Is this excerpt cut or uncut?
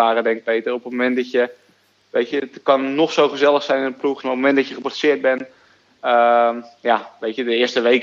cut